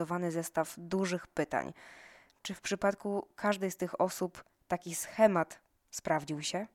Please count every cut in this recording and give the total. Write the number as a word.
zero